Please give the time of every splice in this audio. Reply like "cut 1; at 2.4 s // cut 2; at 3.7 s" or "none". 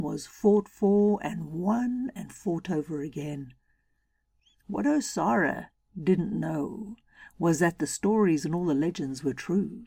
none